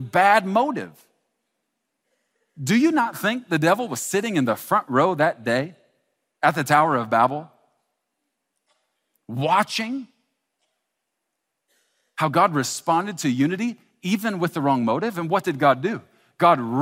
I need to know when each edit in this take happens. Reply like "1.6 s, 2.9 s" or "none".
none